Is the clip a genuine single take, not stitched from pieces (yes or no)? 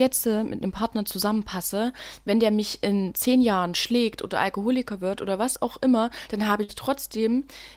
yes